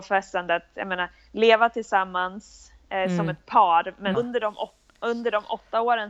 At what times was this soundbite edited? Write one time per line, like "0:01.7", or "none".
0:04.1